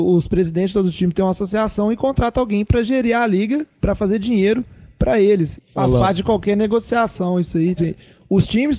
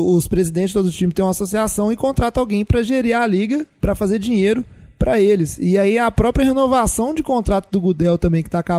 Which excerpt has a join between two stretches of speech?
first; 2 cuts; at 5.6 s, 7.8 s

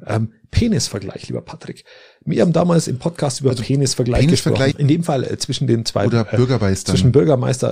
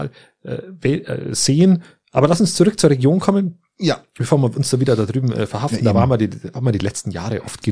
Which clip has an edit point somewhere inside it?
first; 1 cut; at 4.7 s

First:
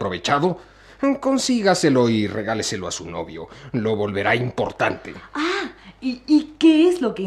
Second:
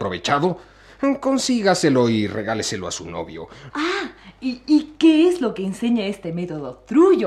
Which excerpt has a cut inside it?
second; 1 cut; at 3.7 s

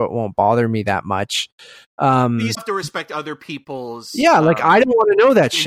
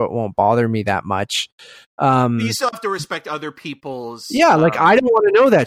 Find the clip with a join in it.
first; 1 cut; at 2.5 s

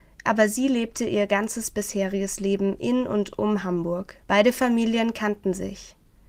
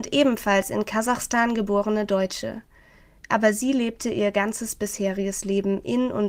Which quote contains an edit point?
first; 1 cut; at 4.2 s

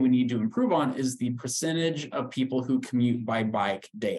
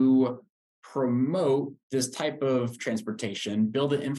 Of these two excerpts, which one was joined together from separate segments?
second; 1 cut; at 1.8 s

